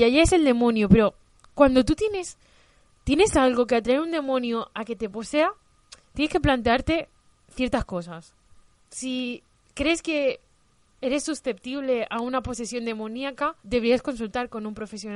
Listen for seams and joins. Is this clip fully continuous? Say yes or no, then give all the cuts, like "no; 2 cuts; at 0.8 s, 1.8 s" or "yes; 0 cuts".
no; 2 cuts; at 8.8 s, 13.6 s